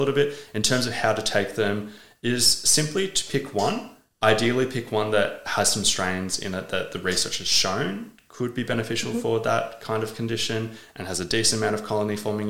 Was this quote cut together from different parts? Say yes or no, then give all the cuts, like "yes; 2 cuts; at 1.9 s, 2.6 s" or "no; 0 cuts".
no; 0 cuts